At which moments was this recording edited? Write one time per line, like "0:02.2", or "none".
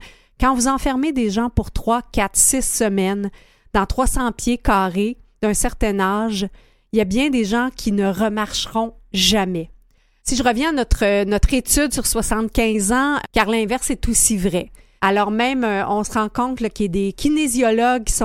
0:10.2
0:13.2
0:15.0